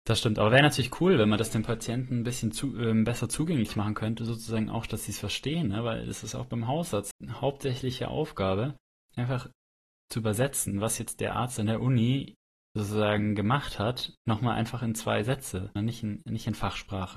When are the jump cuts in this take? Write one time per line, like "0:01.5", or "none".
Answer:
0:07.1
0:15.8